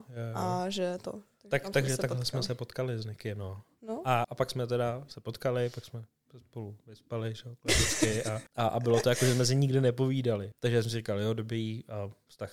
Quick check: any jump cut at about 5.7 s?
no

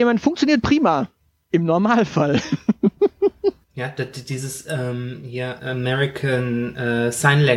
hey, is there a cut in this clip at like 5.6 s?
yes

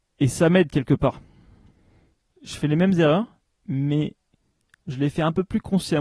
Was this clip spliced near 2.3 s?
no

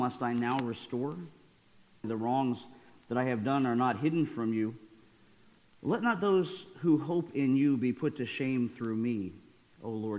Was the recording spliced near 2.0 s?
yes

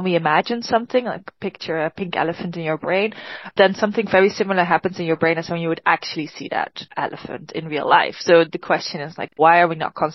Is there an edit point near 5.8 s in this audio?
no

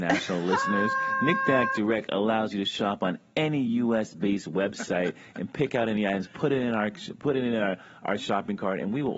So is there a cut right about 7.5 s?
no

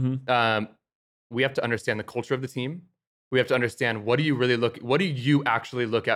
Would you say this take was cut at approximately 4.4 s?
no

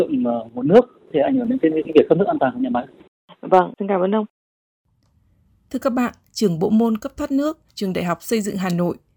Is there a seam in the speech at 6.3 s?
yes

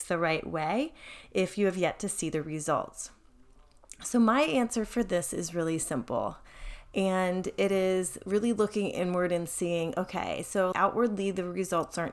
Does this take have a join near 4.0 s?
no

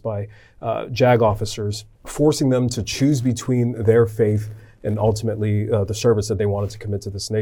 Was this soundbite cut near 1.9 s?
yes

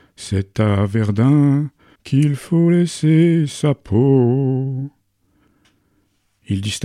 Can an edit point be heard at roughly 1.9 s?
yes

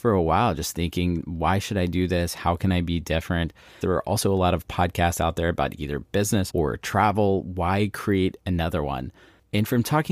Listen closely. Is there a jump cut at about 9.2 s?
no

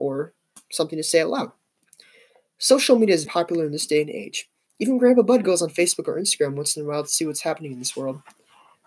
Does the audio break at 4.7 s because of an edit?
no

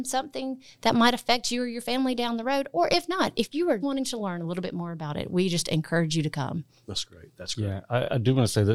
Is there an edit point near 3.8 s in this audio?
yes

